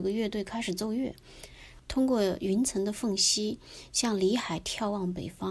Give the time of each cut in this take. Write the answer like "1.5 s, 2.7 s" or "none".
1.8 s